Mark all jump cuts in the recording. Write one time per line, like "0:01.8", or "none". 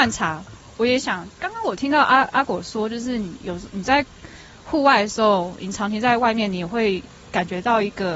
none